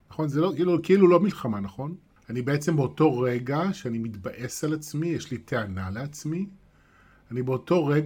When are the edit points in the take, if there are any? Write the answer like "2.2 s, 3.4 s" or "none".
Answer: 2.2 s